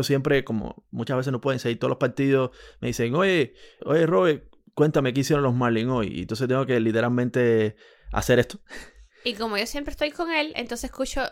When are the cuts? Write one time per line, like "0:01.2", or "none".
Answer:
0:03.8